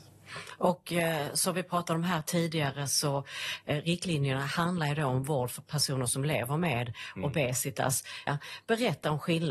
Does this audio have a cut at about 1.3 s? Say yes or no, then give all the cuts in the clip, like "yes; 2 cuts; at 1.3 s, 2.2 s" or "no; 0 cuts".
no; 1 cut; at 8.3 s